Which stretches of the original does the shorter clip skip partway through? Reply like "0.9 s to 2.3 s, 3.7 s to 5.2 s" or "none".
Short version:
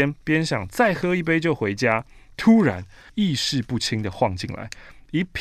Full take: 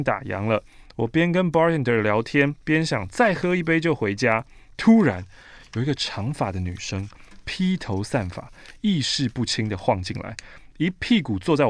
5.5 s to 8.8 s